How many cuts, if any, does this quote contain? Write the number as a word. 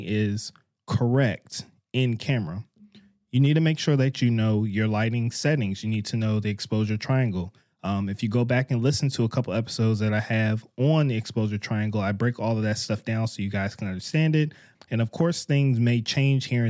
one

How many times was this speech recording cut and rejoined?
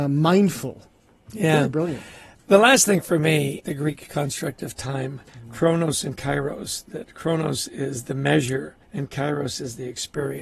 three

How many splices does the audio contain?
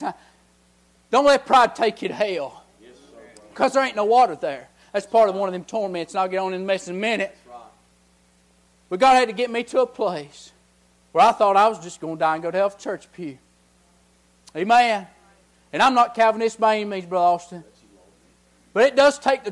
zero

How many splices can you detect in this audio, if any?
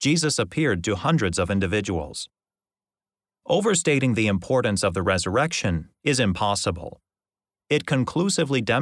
zero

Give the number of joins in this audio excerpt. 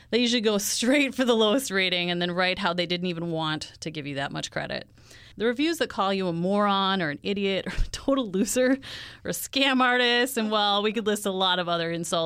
one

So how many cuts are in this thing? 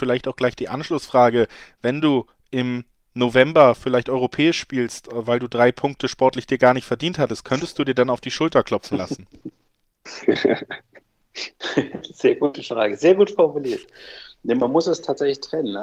zero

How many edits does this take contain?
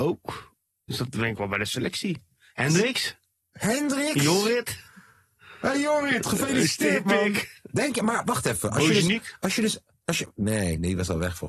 zero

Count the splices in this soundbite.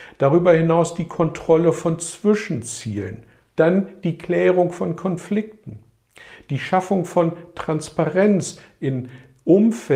one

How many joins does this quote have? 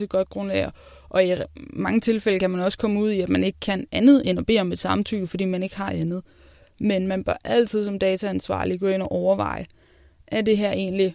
zero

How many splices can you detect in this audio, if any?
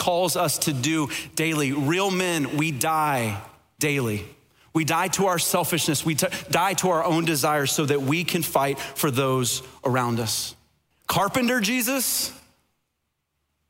one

